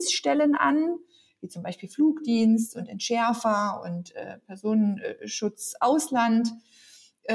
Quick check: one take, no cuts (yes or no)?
yes